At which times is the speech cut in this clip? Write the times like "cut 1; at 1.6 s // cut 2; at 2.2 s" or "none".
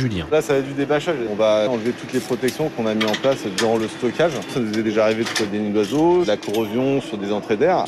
none